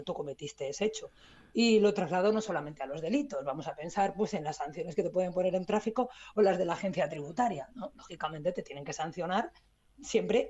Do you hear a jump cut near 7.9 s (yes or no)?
no